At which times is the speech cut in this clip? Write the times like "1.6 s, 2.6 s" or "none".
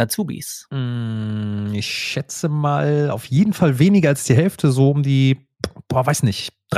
none